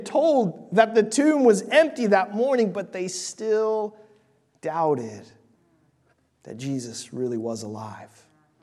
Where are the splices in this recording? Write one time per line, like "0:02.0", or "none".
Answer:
none